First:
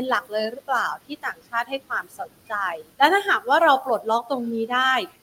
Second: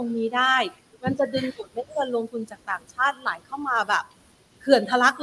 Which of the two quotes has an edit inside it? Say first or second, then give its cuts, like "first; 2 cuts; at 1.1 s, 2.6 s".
first; 1 cut; at 2.9 s